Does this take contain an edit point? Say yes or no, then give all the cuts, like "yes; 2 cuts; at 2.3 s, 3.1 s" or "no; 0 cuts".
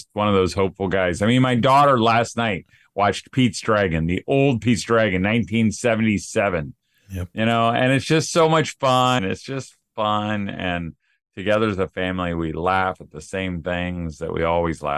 yes; 1 cut; at 9.2 s